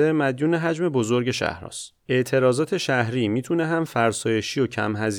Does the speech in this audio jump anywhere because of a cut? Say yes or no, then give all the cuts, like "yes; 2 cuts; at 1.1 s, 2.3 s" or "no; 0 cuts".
yes; 1 cut; at 2.0 s